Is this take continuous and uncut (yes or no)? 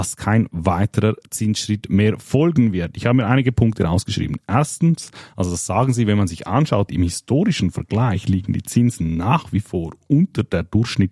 no